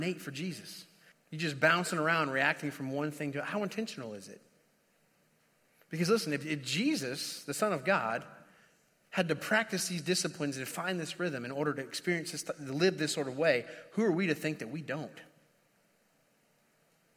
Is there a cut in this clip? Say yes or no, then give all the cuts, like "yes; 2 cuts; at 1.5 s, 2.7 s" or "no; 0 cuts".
yes; 1 cut; at 1.1 s